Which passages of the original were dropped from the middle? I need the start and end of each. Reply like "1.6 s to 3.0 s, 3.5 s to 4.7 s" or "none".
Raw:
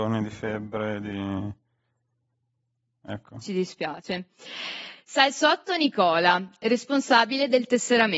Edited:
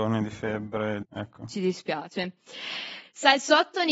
1.0 s to 2.9 s